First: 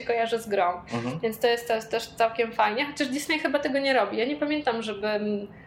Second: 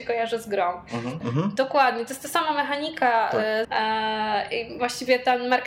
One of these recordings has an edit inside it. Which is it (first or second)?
second